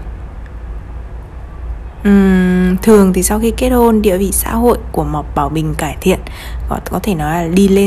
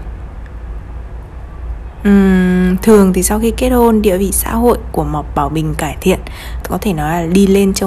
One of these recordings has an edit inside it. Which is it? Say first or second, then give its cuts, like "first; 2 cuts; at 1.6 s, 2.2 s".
second; 1 cut; at 6.6 s